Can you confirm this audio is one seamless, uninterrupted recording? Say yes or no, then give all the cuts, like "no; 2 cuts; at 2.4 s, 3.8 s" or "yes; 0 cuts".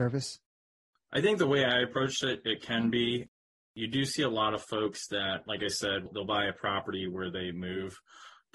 yes; 0 cuts